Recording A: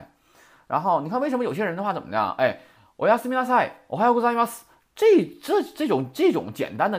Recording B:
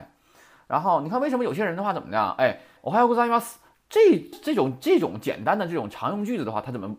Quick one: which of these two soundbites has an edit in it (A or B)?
B